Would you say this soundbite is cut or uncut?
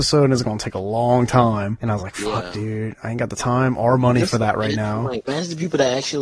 uncut